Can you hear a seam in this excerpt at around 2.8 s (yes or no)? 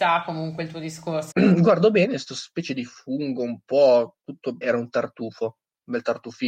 no